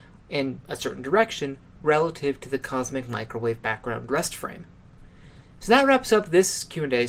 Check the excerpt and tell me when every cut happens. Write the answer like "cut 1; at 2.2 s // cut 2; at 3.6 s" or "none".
none